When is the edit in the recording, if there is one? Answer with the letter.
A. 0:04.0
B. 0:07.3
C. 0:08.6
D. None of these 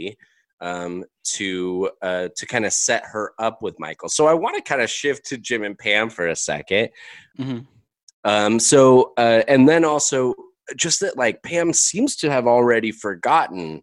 B